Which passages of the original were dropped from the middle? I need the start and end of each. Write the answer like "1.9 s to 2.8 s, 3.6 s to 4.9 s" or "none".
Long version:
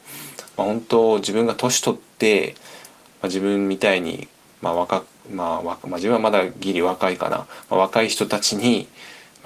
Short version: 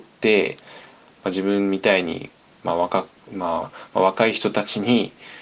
5.6 s to 7.4 s